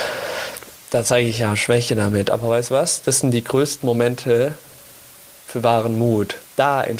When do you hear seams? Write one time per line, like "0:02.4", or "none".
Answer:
none